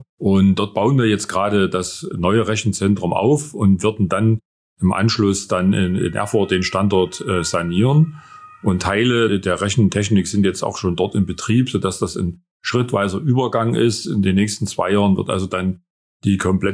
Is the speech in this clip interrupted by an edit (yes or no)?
no